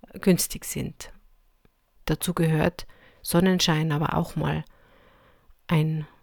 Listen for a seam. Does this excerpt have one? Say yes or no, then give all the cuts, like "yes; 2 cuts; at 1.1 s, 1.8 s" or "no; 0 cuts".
yes; 1 cut; at 2.0 s